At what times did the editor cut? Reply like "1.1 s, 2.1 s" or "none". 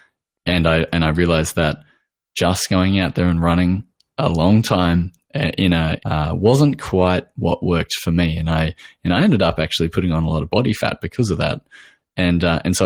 6.0 s

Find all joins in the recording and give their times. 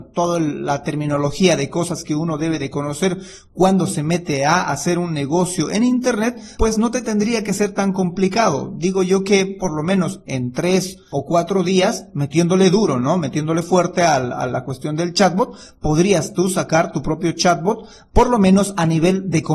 none

